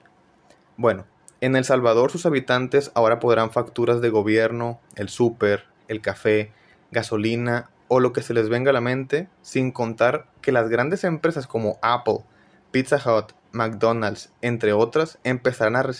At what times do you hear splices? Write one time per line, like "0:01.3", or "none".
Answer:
none